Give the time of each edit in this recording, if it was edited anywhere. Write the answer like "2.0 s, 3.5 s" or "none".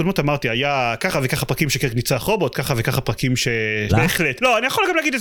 3.9 s